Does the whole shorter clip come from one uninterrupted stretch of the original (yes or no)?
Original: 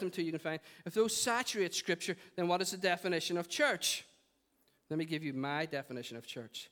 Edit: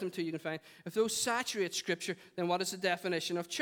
yes